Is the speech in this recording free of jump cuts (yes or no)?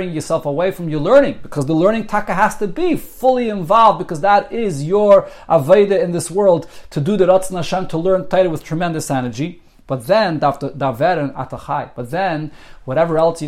yes